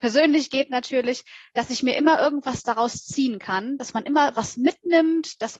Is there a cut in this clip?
no; 0 cuts

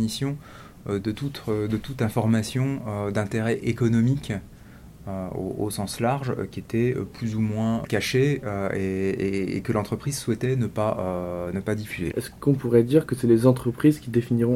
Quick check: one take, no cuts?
no; 3 cuts; at 1.0 s, 7.8 s, 12.1 s

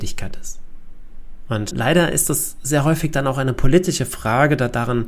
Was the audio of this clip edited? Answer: yes; 1 cut; at 1.7 s

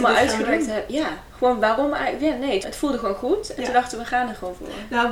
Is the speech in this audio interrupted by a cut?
yes; 1 cut; at 2.6 s

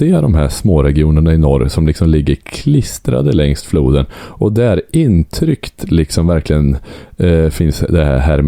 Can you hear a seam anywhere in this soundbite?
no; 0 cuts

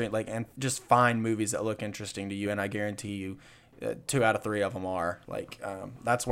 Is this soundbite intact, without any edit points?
yes; 0 cuts

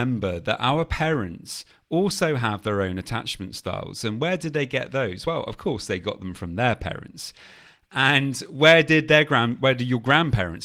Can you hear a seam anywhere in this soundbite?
no; 0 cuts

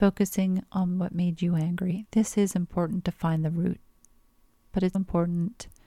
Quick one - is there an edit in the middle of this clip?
yes; 1 cut; at 4.9 s

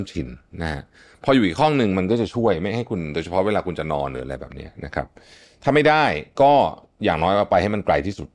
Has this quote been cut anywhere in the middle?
no; 0 cuts

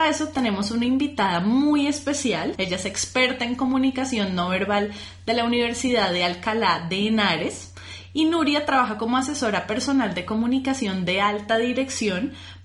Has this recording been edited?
yes; 1 cut; at 2.5 s

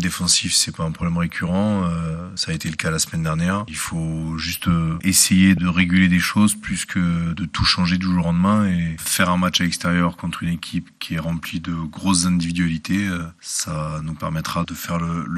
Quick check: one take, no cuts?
yes; 0 cuts

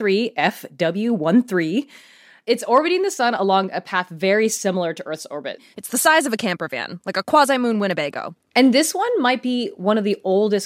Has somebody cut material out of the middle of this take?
yes; 2 cuts; at 5.7 s, 8.4 s

